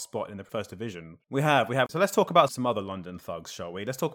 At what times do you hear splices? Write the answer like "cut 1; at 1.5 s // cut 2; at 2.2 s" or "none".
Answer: cut 1; at 1.2 s

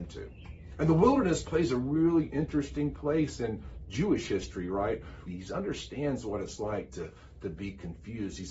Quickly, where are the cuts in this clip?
cut 1; at 5.3 s

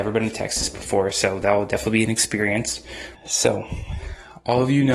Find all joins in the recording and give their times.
cut 1; at 3.1 s

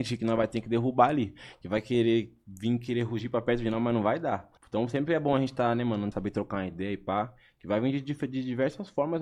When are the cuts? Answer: cut 1; at 4.6 s // cut 2; at 6.1 s

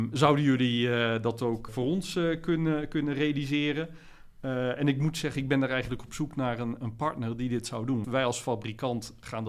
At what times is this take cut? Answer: cut 1; at 1.7 s // cut 2; at 8.0 s

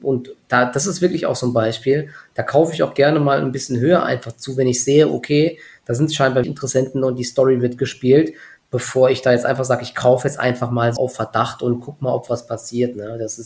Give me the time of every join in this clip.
cut 1; at 6.4 s // cut 2; at 11.0 s

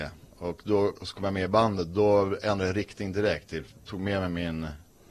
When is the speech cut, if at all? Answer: none

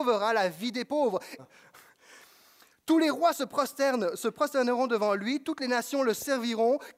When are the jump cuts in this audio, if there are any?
cut 1; at 1.4 s

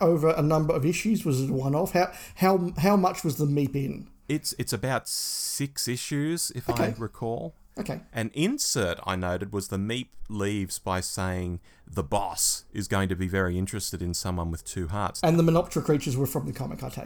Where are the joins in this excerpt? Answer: cut 1; at 8.1 s // cut 2; at 15.2 s

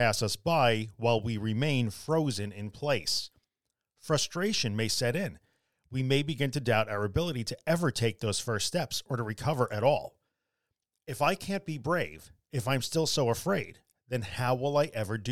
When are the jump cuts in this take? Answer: none

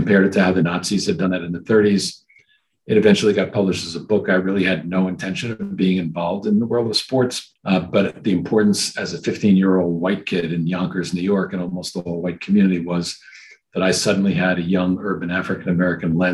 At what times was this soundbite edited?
cut 1; at 7.6 s

